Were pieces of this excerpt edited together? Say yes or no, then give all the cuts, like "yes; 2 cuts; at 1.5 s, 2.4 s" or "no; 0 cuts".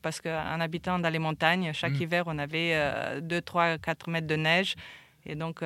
no; 0 cuts